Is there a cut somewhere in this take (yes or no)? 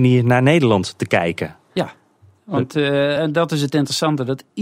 no